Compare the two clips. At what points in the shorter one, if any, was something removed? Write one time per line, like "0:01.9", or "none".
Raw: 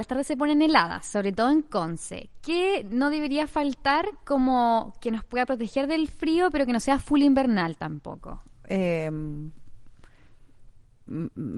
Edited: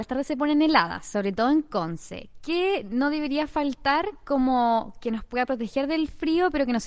none